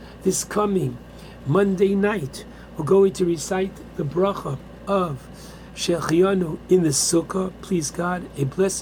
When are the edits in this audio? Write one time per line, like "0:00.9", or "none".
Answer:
none